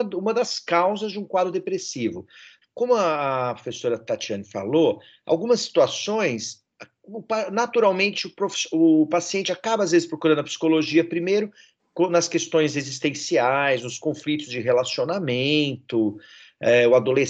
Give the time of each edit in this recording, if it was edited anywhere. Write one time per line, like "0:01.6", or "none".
0:02.6